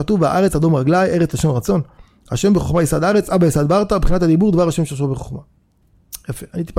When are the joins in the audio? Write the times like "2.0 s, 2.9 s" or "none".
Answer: none